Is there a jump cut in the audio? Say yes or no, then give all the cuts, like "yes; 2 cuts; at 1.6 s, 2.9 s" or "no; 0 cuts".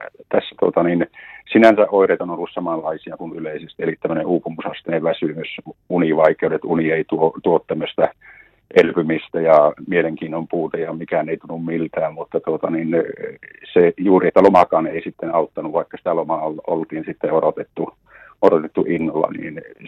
no; 0 cuts